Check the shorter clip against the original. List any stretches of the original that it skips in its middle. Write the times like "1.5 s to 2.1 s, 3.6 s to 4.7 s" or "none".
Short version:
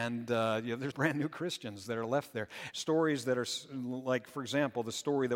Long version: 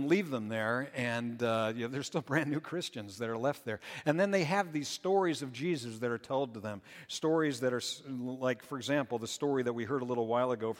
2.0 s to 2.2 s, 4.0 s to 7.1 s